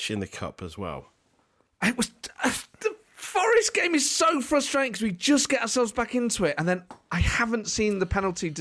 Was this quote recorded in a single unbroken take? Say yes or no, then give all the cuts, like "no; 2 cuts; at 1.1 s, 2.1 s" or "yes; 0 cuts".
yes; 0 cuts